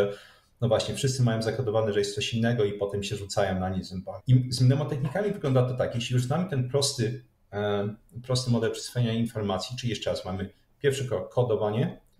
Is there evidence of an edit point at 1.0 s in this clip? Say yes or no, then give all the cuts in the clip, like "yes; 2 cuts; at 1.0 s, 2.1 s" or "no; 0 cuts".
no; 1 cut; at 4.2 s